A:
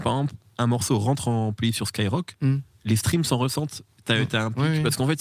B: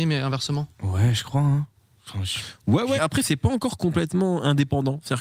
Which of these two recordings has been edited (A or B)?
B